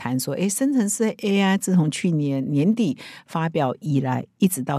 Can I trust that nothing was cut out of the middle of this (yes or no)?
yes